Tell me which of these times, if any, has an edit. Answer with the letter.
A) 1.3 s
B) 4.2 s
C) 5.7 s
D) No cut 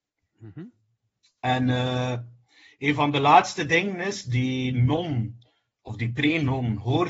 D